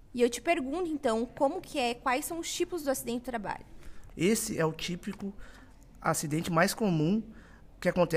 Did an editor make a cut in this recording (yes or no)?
yes